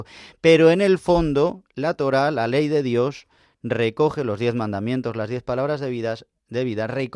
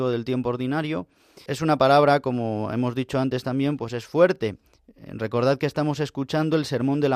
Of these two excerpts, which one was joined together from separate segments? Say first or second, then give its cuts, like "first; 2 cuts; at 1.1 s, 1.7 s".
second; 1 cut; at 1.5 s